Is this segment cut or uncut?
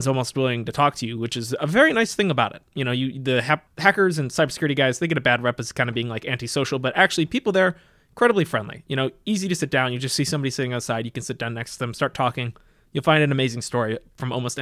cut